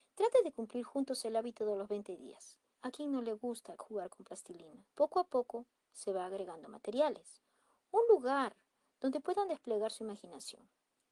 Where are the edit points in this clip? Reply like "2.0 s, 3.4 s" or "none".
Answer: 2.7 s, 4.9 s